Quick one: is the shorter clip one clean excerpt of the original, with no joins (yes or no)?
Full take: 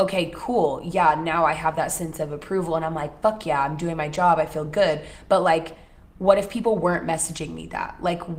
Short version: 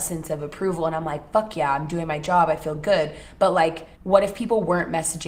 no